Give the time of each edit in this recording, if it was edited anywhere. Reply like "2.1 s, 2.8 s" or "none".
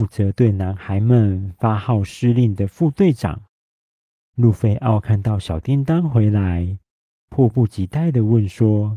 none